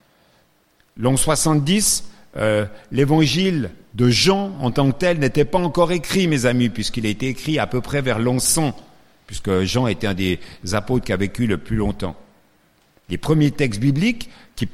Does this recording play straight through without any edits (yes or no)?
yes